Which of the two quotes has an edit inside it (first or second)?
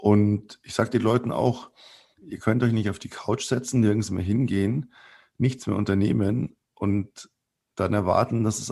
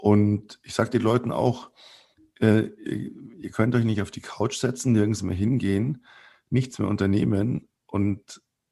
first